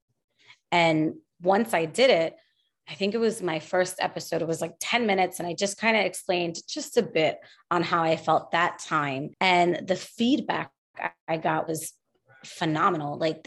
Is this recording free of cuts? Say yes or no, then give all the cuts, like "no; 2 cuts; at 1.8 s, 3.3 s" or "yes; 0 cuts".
no; 1 cut; at 9.3 s